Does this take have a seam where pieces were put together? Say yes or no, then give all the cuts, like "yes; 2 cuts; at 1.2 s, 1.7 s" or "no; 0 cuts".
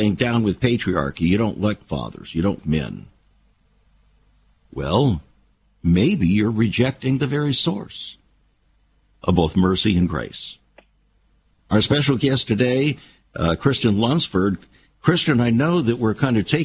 yes; 1 cut; at 2.6 s